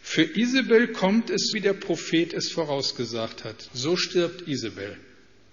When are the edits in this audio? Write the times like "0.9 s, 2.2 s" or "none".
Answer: 1.5 s, 3.7 s